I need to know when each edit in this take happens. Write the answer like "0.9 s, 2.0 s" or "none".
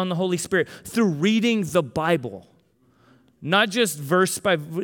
none